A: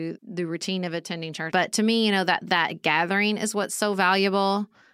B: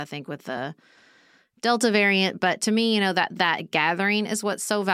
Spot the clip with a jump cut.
A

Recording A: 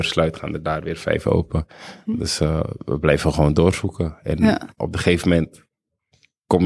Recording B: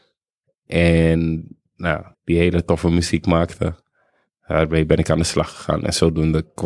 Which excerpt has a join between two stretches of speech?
B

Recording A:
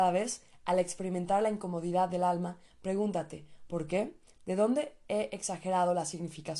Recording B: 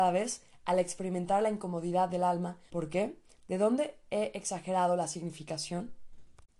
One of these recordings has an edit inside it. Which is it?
B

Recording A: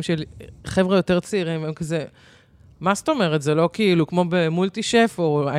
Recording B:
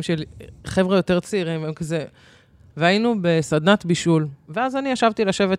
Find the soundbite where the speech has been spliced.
B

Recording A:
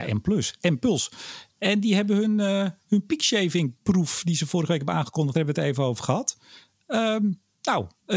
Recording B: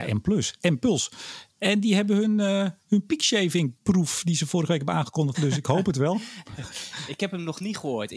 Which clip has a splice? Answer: B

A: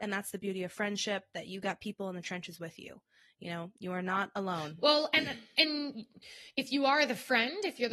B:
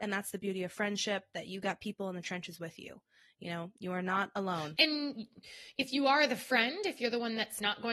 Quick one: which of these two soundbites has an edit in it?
B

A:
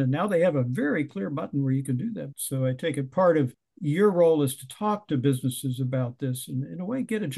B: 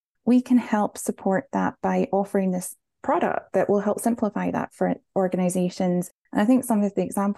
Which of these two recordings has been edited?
A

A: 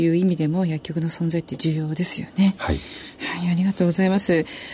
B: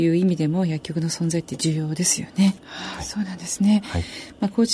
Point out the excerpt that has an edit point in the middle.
B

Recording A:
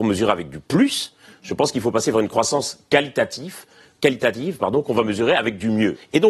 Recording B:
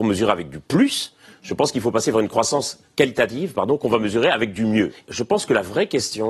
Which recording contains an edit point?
B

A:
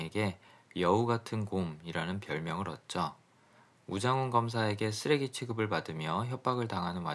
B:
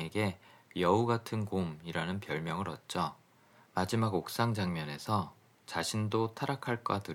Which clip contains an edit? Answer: B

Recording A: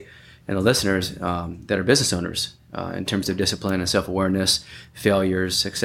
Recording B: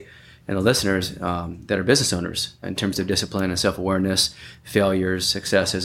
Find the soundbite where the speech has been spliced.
B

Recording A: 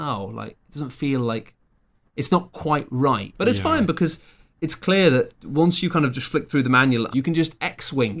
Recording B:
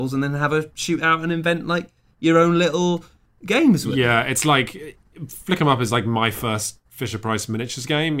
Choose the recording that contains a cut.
A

